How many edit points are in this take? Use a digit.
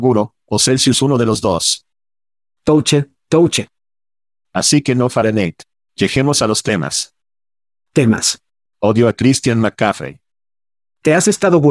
1